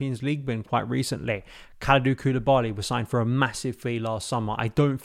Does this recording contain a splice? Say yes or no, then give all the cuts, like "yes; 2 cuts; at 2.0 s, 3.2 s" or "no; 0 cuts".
no; 0 cuts